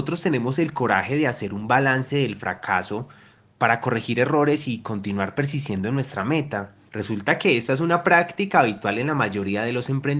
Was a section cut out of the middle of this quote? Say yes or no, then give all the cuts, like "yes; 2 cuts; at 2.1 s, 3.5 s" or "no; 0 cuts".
yes; 1 cut; at 6.9 s